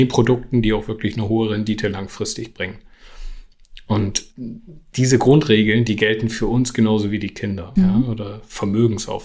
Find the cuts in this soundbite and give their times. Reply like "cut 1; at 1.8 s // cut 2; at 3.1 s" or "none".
cut 1; at 4.3 s // cut 2; at 7.8 s